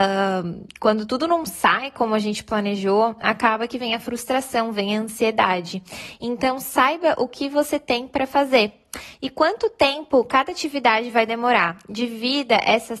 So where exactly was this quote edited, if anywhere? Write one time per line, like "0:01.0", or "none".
none